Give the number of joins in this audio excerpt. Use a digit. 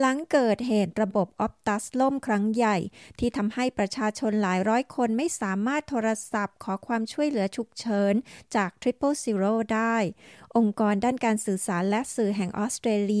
0